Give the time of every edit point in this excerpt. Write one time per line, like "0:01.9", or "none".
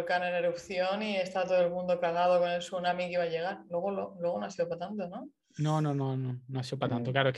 none